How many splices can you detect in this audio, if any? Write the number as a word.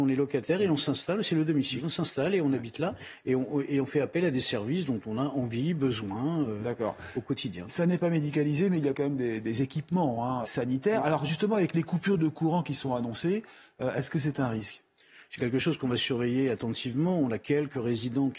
one